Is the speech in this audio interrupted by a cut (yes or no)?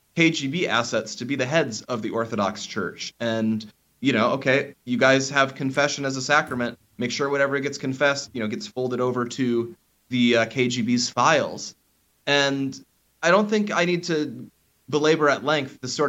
no